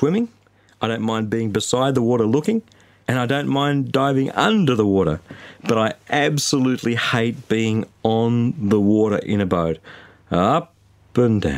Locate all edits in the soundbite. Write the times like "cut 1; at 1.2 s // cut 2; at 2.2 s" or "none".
none